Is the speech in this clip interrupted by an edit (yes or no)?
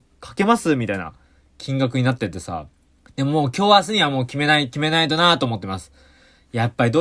yes